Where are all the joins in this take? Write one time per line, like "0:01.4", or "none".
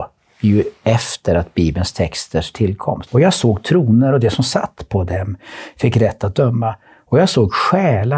0:03.1